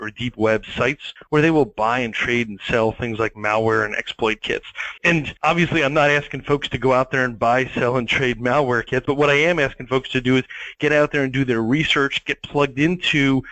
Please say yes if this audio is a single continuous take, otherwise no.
yes